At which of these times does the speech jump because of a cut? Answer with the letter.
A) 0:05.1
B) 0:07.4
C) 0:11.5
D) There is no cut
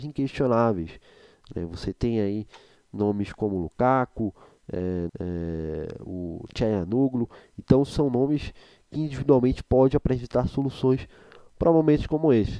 A